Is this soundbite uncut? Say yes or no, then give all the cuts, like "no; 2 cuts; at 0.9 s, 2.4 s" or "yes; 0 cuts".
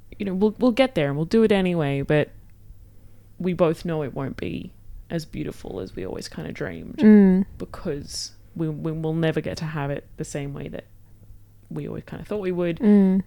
yes; 0 cuts